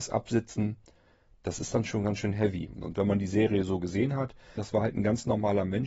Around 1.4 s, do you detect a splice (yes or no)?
no